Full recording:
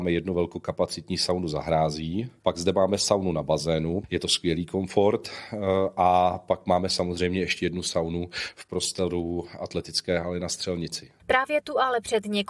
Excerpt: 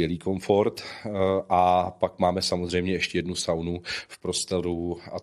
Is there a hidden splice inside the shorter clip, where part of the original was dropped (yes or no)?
no